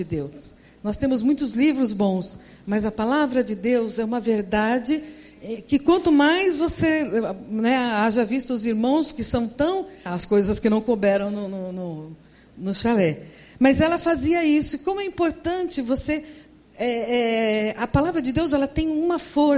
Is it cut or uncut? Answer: cut